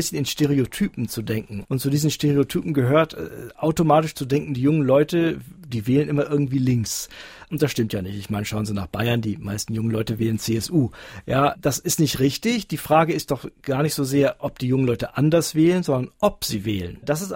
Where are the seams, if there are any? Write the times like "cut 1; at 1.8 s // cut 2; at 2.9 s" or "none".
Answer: none